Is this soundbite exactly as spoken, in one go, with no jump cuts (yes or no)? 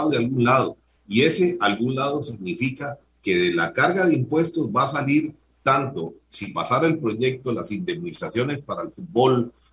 yes